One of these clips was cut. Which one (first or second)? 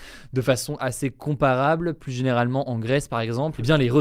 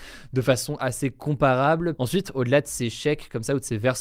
second